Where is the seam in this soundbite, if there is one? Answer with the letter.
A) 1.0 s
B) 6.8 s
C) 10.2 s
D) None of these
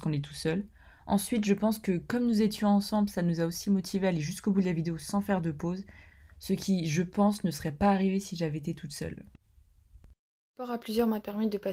A